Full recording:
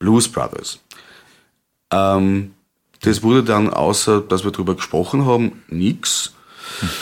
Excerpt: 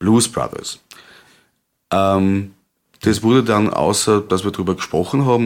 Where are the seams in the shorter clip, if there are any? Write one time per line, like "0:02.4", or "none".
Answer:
none